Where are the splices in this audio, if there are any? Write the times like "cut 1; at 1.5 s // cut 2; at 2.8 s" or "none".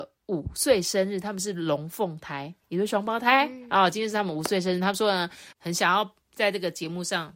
cut 1; at 5.6 s